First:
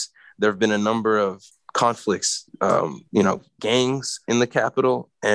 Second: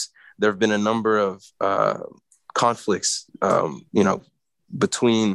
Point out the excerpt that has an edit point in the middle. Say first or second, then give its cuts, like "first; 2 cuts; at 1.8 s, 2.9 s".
first; 2 cuts; at 1.5 s, 3.6 s